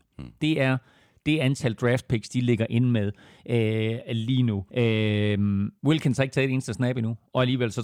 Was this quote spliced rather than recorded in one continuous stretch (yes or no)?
yes